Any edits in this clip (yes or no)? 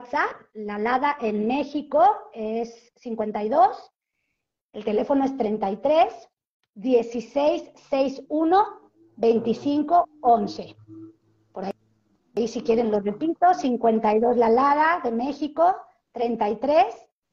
no